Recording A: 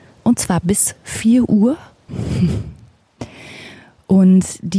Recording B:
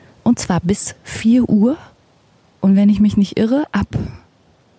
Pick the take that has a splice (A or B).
A